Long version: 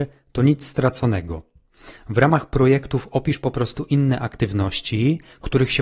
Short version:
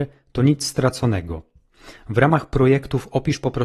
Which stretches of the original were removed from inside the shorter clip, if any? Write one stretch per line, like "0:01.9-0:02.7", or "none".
none